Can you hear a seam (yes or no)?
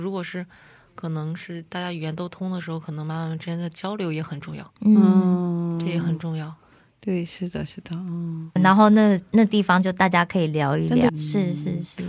yes